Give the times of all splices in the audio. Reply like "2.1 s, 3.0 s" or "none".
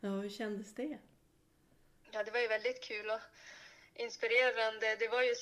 none